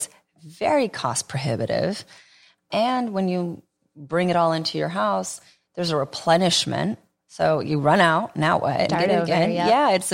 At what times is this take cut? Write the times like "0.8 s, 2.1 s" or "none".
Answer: 8.9 s